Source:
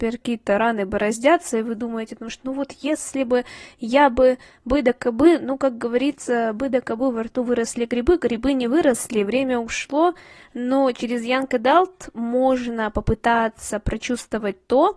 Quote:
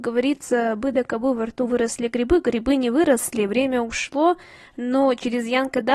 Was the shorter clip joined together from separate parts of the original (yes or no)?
no